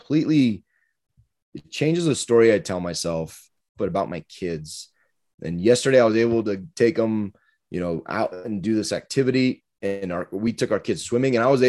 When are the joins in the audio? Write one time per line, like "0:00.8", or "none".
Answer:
0:03.7